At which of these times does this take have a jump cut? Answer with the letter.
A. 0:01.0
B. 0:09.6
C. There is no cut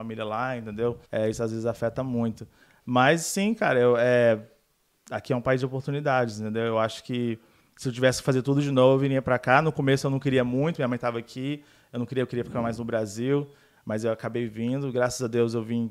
A